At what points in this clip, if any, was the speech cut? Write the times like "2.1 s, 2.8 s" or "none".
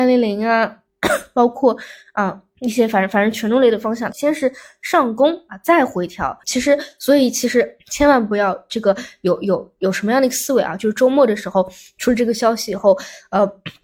4.1 s, 6.4 s